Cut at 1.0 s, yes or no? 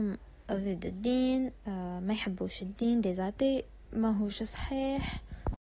no